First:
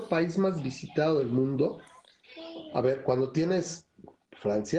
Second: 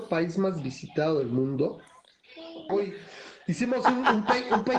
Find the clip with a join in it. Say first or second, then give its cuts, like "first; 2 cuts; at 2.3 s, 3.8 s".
second; 1 cut; at 2.7 s